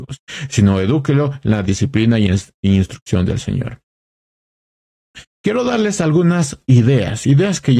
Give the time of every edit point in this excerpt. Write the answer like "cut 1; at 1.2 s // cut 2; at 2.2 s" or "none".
cut 1; at 5.3 s